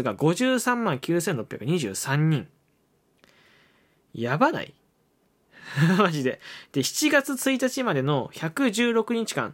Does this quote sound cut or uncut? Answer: uncut